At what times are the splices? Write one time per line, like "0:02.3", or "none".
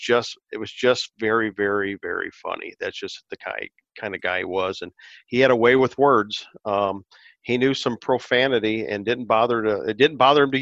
none